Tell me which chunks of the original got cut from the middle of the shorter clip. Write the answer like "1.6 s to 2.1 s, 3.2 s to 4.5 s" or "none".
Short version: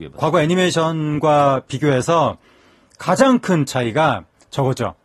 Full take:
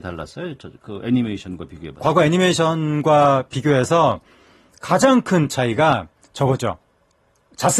none